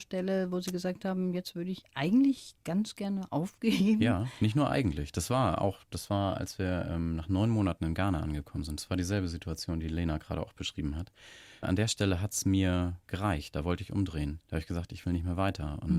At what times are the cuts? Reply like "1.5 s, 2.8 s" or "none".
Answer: 14.4 s